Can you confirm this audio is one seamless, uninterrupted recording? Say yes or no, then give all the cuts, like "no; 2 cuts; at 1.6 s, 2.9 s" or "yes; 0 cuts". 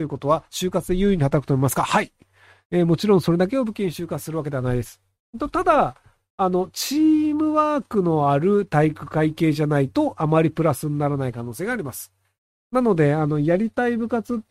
yes; 0 cuts